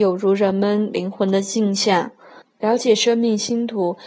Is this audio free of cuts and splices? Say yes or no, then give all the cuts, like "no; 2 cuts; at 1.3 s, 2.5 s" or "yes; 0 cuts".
no; 1 cut; at 2.4 s